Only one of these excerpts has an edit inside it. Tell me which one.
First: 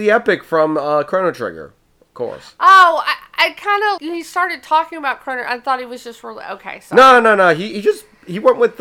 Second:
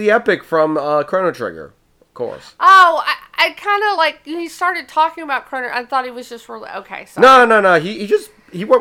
first; 1 cut; at 4.0 s

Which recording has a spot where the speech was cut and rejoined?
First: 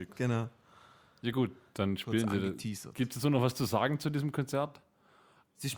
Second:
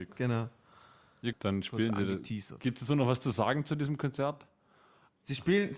second; 1 cut; at 1.3 s

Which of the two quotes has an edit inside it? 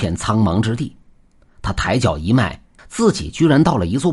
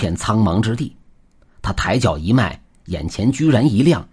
first; 1 cut; at 2.8 s

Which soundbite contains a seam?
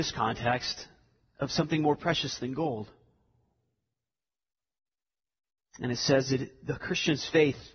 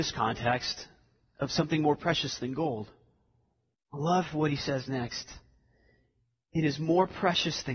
second; 1 cut; at 3.7 s

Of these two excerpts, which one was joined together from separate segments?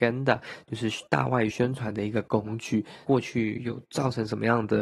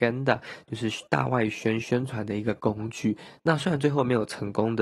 first; 2 cuts; at 1.5 s, 3.1 s

